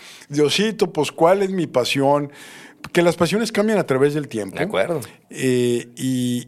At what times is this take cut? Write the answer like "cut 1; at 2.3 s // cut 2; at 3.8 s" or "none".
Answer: cut 1; at 5.2 s